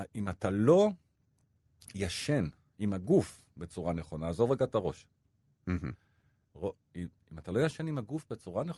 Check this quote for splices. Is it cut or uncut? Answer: cut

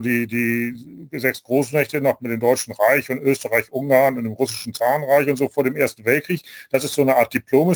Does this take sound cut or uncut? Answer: uncut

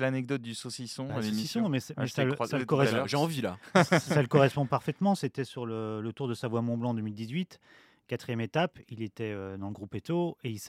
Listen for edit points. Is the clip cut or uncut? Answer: uncut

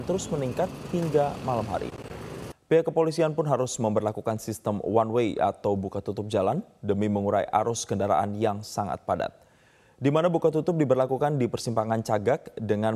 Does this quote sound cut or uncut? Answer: cut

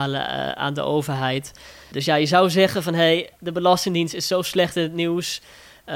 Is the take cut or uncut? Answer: cut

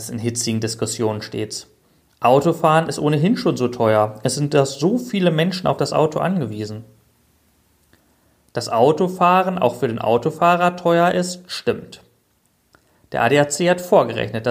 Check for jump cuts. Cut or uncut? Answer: uncut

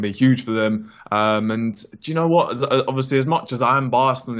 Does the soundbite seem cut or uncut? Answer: uncut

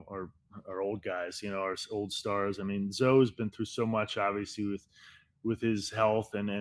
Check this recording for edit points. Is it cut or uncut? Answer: uncut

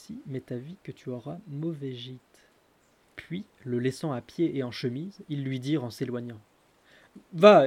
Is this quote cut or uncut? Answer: cut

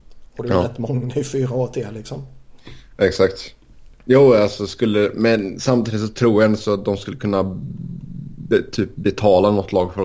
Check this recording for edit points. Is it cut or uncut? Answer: uncut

